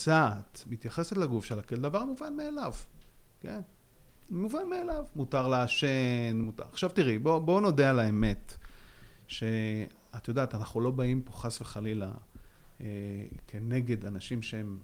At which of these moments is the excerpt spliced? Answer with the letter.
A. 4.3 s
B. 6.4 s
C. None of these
B